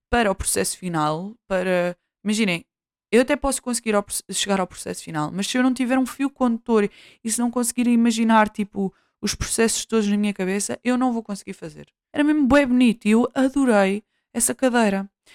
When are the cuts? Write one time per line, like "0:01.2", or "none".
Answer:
0:12.1